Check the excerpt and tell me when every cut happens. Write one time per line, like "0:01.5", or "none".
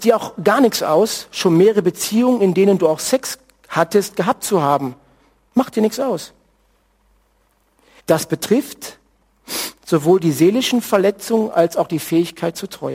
0:08.0